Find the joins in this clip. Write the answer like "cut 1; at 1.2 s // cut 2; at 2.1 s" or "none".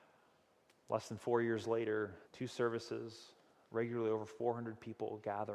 cut 1; at 2.3 s